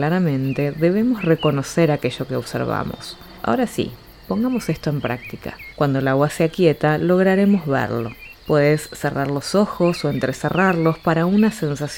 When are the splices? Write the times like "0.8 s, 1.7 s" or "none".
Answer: 5.7 s, 8.3 s